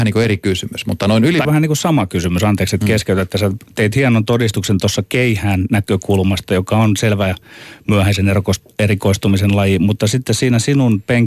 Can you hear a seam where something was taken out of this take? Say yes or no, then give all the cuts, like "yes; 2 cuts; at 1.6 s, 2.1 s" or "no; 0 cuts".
yes; 1 cut; at 1.4 s